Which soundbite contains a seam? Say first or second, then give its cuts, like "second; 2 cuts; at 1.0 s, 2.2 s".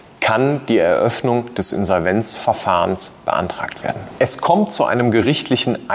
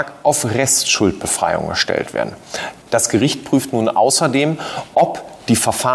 second; 1 cut; at 2.8 s